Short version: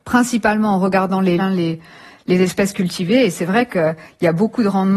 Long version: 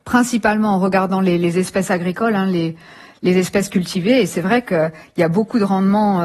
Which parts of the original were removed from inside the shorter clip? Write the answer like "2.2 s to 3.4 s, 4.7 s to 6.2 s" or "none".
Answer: 1.4 s to 2.3 s